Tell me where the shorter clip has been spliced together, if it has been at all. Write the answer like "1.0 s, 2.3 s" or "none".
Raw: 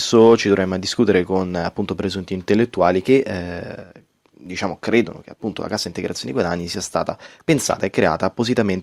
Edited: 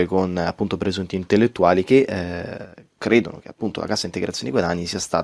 3.0 s